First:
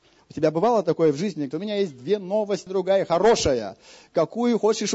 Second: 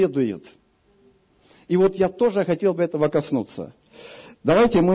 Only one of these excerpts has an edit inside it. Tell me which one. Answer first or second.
first